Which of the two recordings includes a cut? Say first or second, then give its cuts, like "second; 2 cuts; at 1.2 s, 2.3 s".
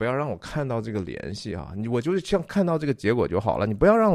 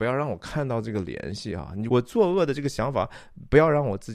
second; 1 cut; at 1.9 s